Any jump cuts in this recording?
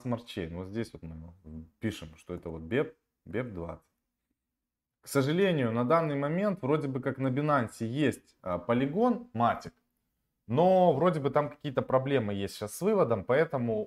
no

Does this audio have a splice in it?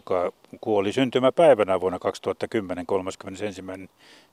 no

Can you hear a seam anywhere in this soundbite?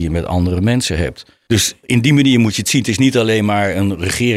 no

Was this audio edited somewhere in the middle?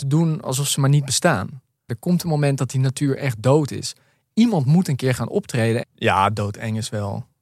yes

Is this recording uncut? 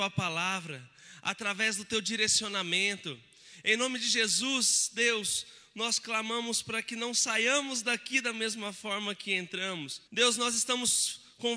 no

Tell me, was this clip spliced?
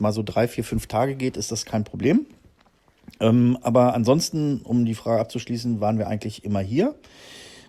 no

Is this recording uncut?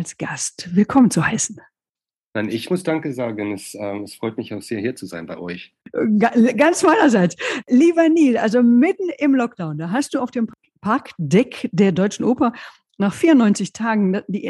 yes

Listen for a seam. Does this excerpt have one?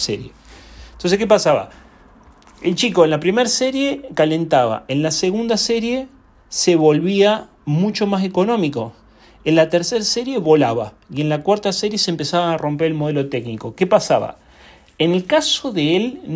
no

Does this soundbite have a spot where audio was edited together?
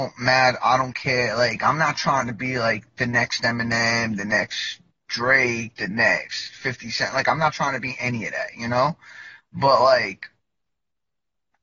no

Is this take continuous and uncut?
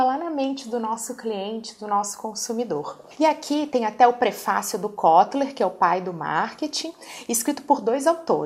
yes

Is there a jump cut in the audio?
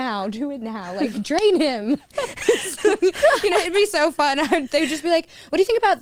no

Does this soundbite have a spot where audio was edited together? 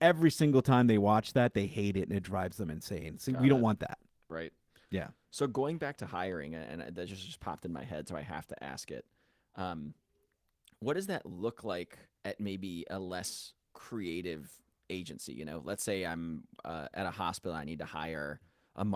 yes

